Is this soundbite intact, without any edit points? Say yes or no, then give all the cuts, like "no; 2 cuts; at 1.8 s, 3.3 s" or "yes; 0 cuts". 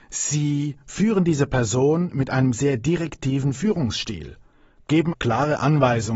no; 1 cut; at 5.1 s